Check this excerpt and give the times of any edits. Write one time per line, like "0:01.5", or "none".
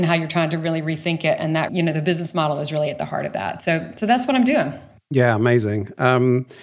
0:01.7